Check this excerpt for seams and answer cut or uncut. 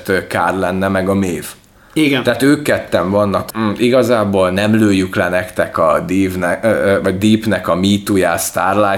cut